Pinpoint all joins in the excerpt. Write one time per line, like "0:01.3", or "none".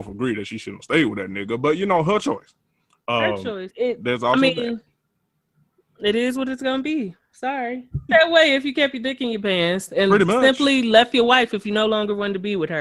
0:03.7
0:08.1